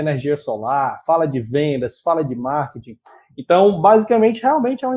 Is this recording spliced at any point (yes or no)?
no